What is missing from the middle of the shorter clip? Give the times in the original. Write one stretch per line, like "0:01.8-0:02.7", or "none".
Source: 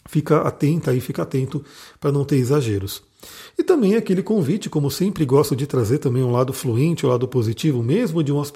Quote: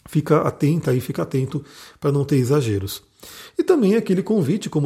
none